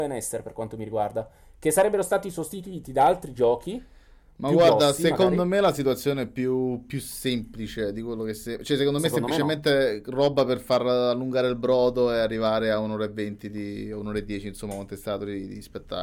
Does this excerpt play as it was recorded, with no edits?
yes; 0 cuts

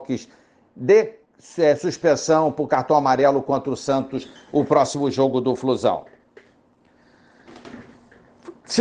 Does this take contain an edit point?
no; 0 cuts

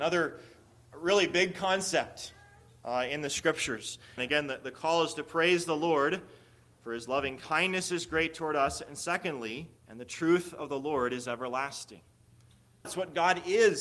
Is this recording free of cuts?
no; 3 cuts; at 4.2 s, 9.8 s, 12.8 s

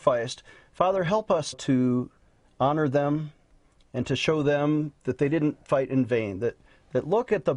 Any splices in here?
yes; 2 cuts; at 1.5 s, 5.0 s

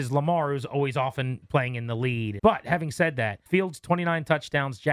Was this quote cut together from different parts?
yes; 2 cuts; at 2.4 s, 3.5 s

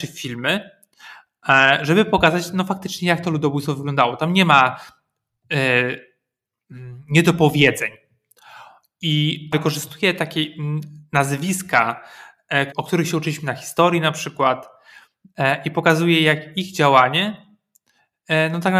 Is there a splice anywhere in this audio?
yes; 1 cut; at 12.7 s

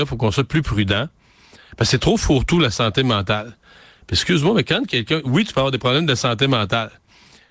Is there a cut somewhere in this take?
no; 0 cuts

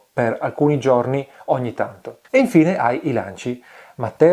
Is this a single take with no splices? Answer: no; 1 cut; at 2.2 s

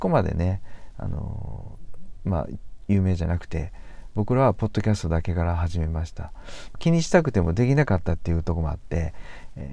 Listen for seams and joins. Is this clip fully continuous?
no; 1 cut; at 6.7 s

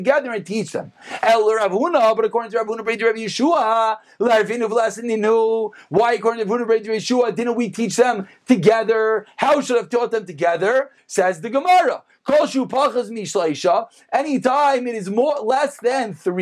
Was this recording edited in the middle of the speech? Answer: no; 0 cuts

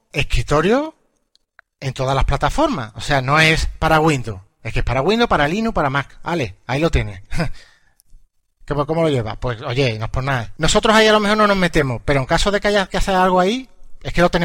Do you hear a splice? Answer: yes; 1 cut; at 10.6 s

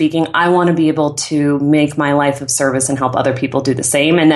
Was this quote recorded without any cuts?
yes; 0 cuts

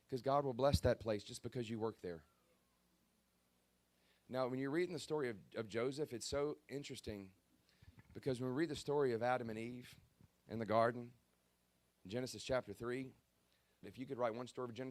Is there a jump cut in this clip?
yes; 1 cut; at 13.8 s

